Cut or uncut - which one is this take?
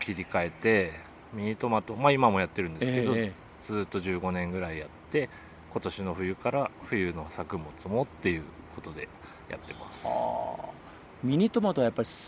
cut